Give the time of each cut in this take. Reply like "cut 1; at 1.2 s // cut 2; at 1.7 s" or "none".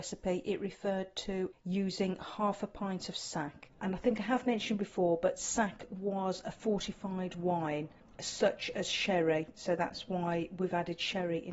none